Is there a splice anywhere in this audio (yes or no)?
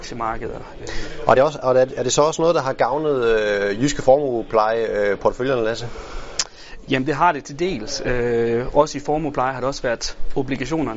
no